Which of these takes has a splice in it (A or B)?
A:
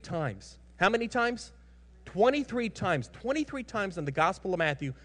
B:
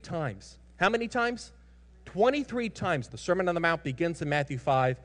B